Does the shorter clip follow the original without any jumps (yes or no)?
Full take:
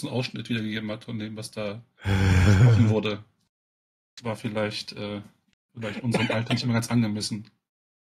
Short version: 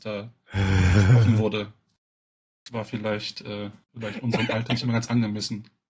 no